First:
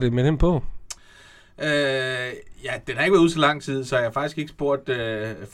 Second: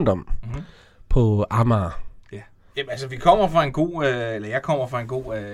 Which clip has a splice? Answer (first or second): second